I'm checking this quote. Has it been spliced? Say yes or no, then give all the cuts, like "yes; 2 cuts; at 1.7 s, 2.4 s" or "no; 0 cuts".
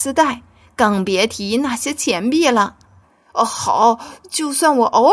yes; 1 cut; at 3.0 s